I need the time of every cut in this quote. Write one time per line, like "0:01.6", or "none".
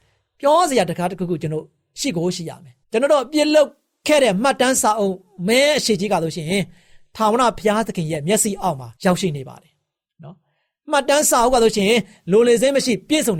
0:02.8
0:09.0